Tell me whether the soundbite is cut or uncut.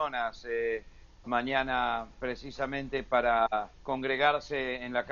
cut